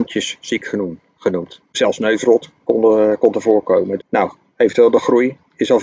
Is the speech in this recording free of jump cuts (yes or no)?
no